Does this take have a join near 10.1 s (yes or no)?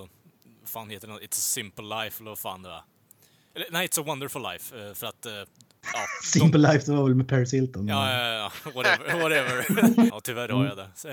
yes